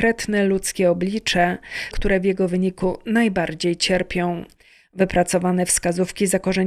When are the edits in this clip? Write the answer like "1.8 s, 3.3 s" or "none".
1.9 s